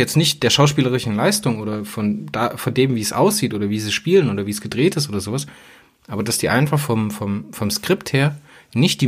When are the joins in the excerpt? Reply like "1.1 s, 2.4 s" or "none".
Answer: none